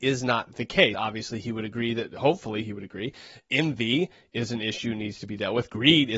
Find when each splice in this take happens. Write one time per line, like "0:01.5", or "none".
0:00.9